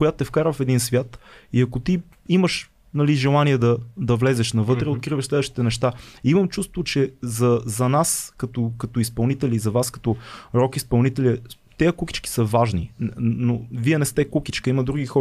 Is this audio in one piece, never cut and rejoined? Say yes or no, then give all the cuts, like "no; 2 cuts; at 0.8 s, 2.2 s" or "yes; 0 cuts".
yes; 0 cuts